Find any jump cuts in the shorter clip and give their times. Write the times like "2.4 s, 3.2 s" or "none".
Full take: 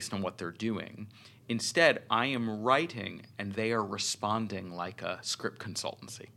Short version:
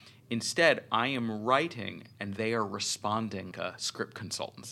3.5 s